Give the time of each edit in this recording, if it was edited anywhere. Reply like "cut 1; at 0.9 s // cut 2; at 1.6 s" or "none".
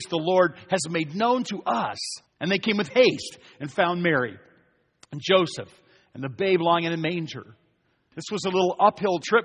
cut 1; at 2.3 s // cut 2; at 8.1 s